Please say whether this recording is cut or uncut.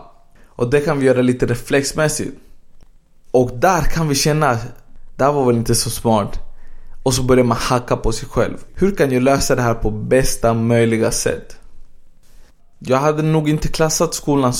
cut